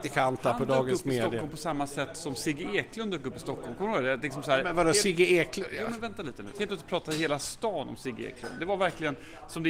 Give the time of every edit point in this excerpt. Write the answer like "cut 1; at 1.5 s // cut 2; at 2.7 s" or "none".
cut 1; at 6.5 s